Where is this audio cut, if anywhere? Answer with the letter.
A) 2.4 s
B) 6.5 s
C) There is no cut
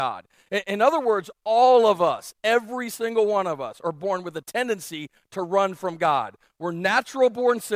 C